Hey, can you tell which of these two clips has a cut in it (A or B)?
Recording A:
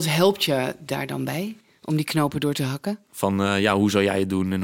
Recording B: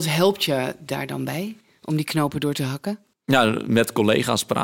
A